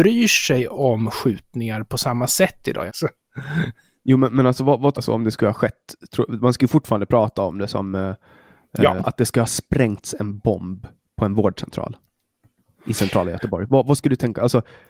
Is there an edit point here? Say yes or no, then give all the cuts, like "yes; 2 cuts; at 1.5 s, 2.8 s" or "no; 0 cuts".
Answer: yes; 3 cuts; at 2.9 s, 4.9 s, 9.0 s